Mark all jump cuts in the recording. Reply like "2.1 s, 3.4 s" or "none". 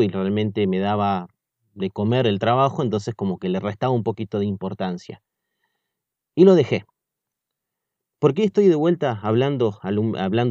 none